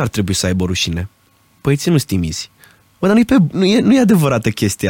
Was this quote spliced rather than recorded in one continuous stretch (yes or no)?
yes